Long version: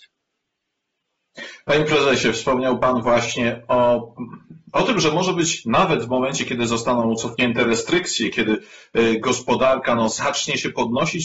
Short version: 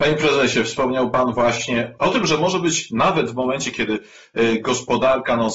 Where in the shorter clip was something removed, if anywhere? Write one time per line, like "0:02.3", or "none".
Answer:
0:02.0
0:03.7